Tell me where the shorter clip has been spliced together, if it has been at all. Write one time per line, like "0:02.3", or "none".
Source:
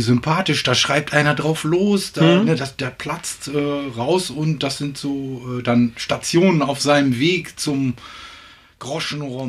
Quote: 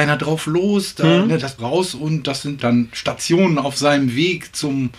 0:01.6
0:02.6